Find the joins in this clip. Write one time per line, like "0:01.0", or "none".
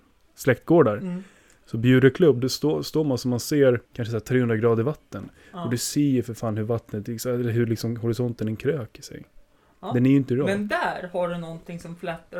0:03.9